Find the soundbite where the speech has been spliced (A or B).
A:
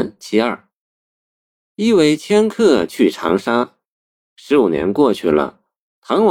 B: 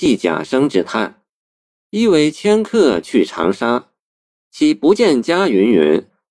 B